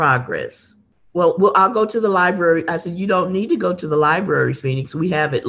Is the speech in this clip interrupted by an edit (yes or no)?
no